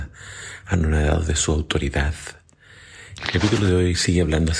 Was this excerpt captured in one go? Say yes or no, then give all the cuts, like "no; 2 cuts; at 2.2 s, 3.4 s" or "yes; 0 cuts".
no; 1 cut; at 3.2 s